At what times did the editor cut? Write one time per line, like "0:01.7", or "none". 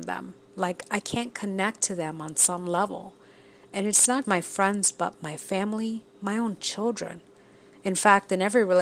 0:04.2